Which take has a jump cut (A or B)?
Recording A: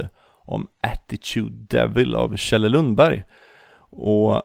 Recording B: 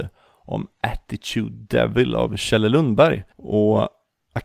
B